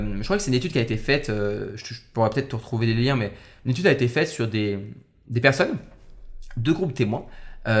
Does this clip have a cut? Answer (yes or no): no